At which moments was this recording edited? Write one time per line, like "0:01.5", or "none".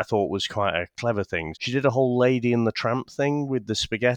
0:01.5

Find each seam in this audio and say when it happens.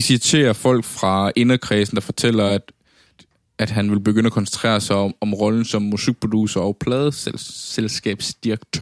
none

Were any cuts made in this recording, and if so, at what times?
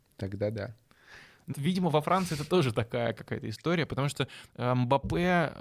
0:01.5

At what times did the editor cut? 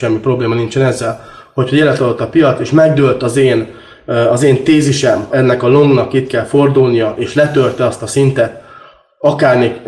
0:05.3

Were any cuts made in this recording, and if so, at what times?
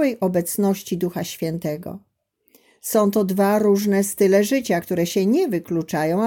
none

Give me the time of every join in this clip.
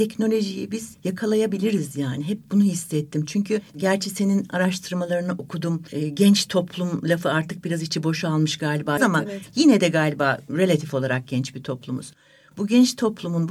0:09.0

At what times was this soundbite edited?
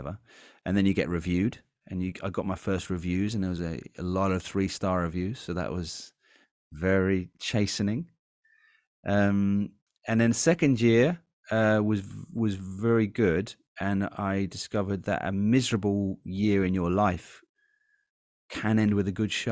none

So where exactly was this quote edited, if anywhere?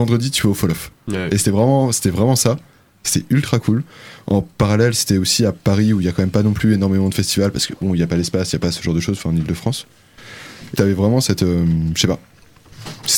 0:10.8

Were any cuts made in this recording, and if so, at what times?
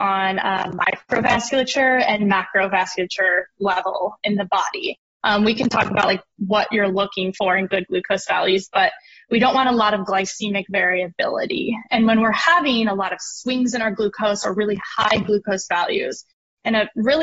0:05.1

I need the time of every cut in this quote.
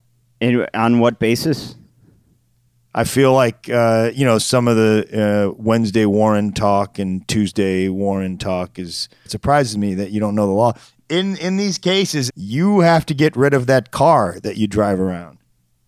0:09.3
0:12.3

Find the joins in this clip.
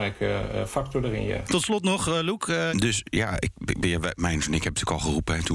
0:02.7

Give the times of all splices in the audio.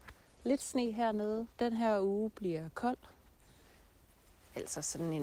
0:01.5

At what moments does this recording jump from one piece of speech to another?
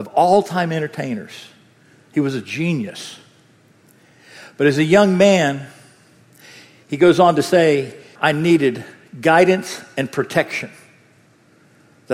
0:08.2

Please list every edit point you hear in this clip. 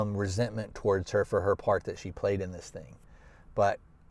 none

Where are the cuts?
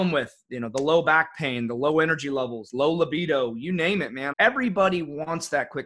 0:04.3

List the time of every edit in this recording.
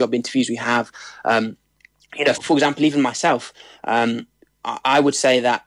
0:02.4

